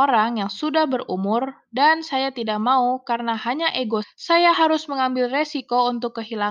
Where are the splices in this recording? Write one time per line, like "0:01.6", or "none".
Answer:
0:04.0